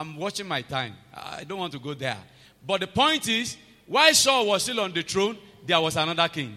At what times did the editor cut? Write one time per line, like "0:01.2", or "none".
none